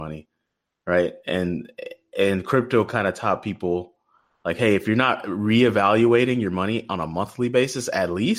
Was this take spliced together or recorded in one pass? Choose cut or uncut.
uncut